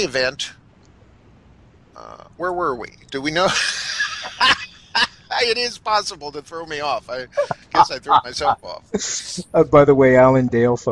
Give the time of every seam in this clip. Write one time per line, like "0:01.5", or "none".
none